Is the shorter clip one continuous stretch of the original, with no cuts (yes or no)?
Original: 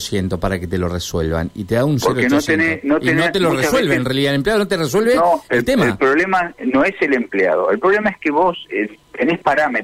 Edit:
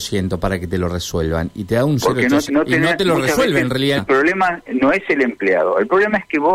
no